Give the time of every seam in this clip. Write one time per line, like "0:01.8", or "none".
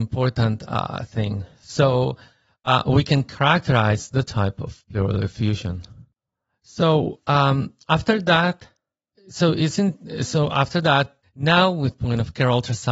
0:09.1
0:11.2